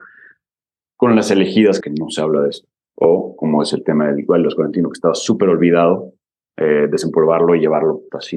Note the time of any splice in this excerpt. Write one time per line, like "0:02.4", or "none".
0:01.8